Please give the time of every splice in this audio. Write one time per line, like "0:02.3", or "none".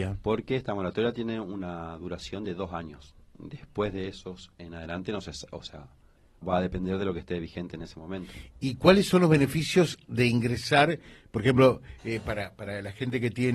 0:06.4